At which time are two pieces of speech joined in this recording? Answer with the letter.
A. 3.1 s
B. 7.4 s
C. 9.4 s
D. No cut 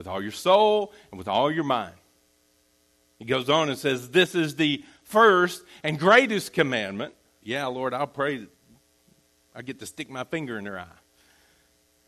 B